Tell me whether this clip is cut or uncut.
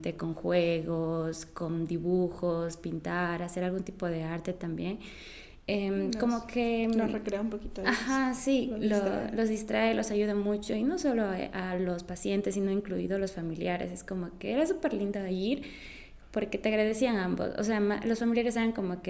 uncut